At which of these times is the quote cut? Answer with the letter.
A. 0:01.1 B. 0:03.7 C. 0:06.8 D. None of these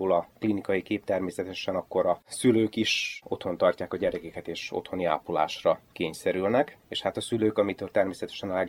C